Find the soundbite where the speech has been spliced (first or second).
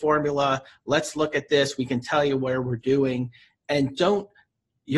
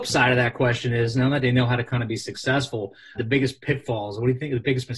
second